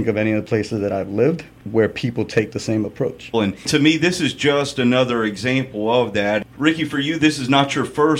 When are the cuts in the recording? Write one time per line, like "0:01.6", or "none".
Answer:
0:03.3